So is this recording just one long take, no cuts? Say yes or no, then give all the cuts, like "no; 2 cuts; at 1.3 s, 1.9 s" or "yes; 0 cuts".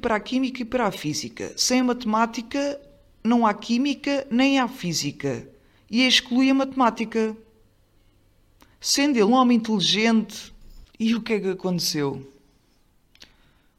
no; 2 cuts; at 9.3 s, 10.9 s